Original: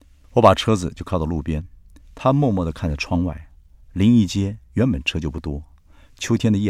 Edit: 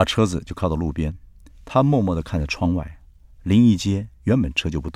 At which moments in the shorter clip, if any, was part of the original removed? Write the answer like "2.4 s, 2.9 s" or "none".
none